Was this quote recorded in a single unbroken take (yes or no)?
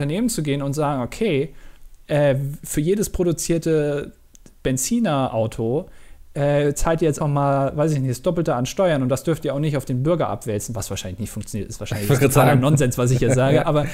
no